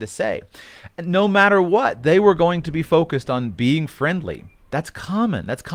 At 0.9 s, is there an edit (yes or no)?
no